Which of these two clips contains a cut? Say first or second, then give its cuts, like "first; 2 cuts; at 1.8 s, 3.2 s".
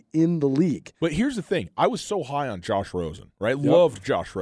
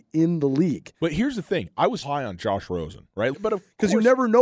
second; 2 cuts; at 2.0 s, 3.3 s